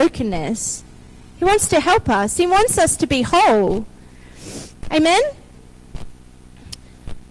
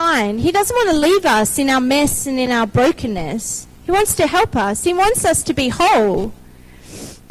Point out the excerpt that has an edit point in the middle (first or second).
second